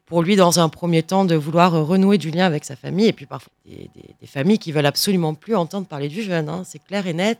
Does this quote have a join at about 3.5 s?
yes; 1 cut; at 3.5 s

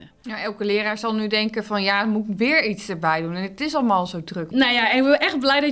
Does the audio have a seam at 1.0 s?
no; 1 cut; at 4.5 s

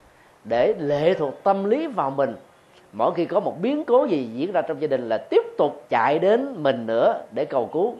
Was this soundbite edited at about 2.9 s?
no; 1 cut; at 5.9 s

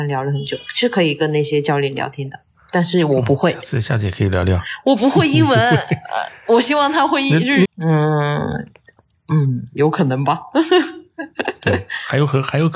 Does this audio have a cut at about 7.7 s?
yes; 1 cut; at 7.7 s

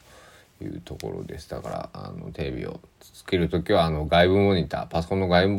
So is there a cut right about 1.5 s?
no; 1 cut; at 2.9 s

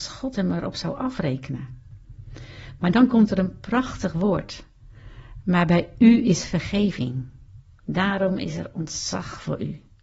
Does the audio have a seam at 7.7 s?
no; 0 cuts

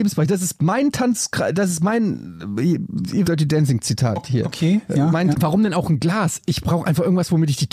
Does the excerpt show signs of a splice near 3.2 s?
yes; 2 cuts; at 3.2 s, 5.3 s

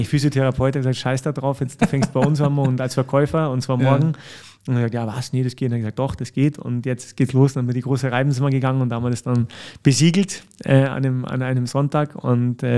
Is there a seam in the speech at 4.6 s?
no; 0 cuts

